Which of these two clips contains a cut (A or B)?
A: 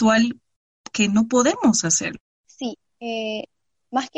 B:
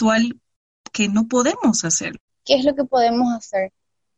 B